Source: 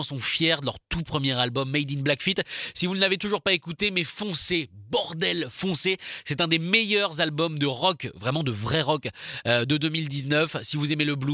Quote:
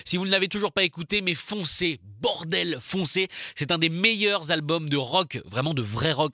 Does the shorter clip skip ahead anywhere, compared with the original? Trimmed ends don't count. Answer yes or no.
no